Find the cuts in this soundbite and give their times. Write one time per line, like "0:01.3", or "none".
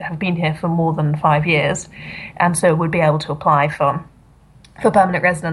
none